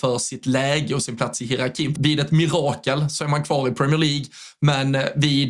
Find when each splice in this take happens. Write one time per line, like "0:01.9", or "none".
0:02.0